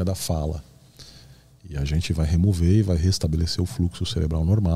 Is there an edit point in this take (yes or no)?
no